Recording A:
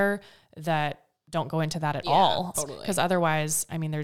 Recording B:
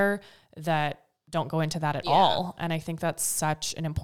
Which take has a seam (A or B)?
A